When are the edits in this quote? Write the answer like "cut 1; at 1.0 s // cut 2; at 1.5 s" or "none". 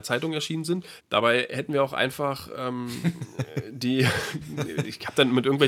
cut 1; at 1.0 s